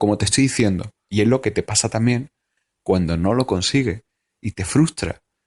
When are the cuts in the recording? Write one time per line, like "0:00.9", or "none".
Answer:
0:01.1